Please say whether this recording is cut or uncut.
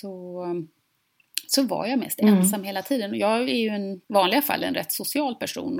cut